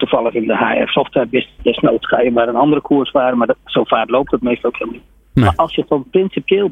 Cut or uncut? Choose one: cut